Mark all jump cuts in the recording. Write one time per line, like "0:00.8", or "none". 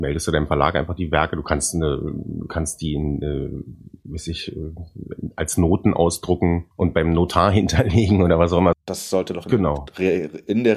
0:06.7
0:08.7